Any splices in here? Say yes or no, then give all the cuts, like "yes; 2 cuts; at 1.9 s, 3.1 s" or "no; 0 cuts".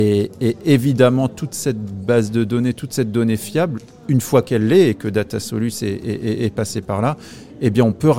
no; 0 cuts